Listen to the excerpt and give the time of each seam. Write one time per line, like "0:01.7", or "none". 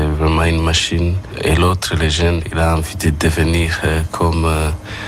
none